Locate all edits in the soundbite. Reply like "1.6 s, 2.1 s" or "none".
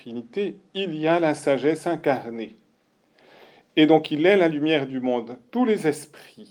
5.5 s